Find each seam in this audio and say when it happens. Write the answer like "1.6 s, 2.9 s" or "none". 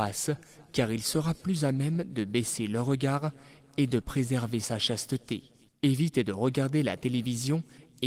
5.7 s